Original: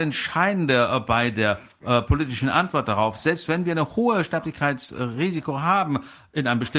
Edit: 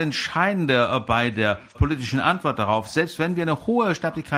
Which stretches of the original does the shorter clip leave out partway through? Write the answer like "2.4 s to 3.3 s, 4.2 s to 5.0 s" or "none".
1.7 s to 2.0 s